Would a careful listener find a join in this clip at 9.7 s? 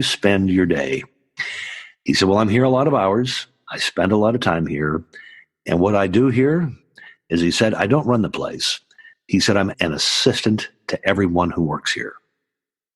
yes; 1 cut; at 9.7 s

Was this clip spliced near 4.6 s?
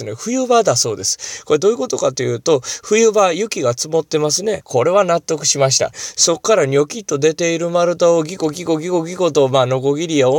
yes; 2 cuts; at 4.6 s, 5.9 s

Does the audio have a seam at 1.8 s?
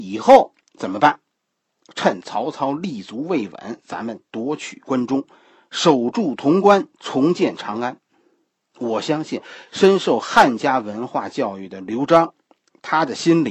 no; 0 cuts

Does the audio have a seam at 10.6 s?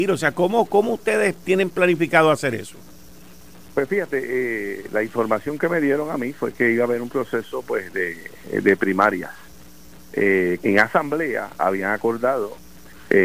yes; 1 cut; at 10.6 s

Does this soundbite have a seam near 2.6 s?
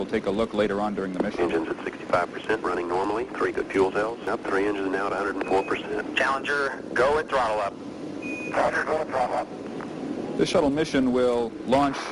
yes; 1 cut; at 2.6 s

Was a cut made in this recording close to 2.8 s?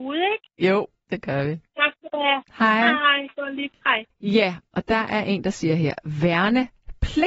no; 1 cut; at 4.1 s

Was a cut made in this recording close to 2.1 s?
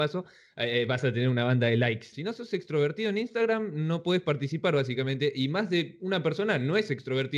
yes; 1 cut; at 2.1 s

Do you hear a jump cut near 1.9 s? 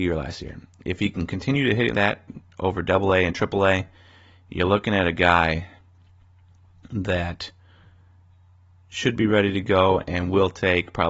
yes; 1 cut; at 1.9 s

